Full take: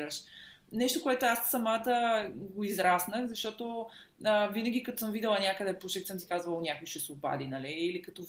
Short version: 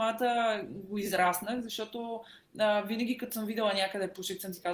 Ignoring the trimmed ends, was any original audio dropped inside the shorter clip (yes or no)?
no